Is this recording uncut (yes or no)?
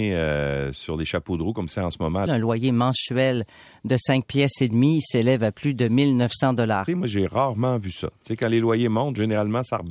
no